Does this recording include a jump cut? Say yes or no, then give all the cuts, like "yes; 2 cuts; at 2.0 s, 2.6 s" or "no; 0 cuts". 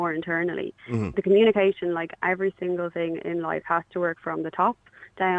no; 0 cuts